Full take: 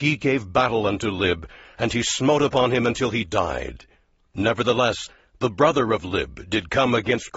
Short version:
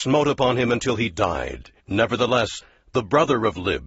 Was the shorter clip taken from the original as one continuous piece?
no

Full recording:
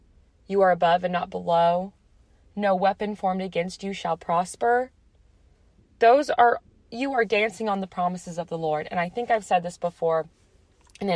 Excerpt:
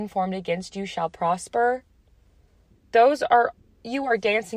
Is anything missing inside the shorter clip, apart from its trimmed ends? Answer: no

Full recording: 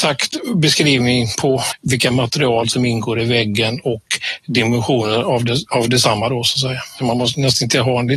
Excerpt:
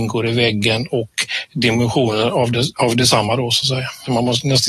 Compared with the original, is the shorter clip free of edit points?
yes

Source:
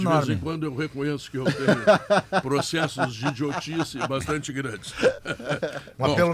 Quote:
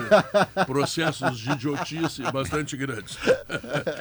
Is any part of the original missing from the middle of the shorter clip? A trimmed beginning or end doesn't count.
no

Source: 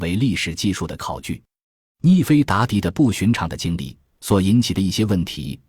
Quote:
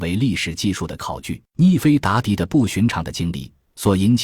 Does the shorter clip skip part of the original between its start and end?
yes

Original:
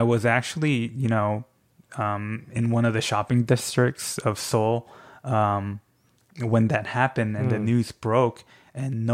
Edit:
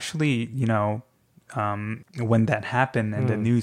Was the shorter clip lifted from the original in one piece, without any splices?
no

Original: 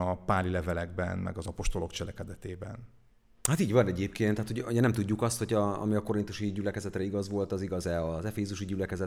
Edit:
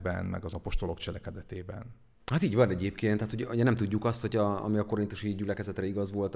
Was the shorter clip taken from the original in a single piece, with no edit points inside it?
no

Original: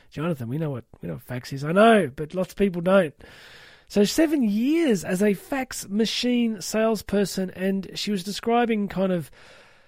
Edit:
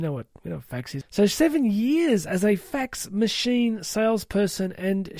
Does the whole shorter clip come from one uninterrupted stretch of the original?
no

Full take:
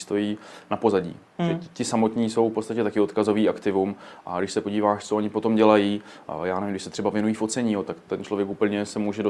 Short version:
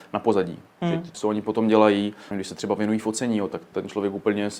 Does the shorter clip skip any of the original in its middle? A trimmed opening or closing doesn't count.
yes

